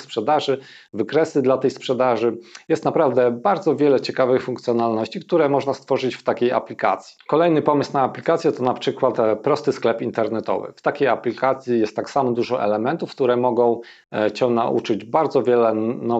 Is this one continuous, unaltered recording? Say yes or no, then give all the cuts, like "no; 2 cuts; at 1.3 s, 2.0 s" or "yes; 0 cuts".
yes; 0 cuts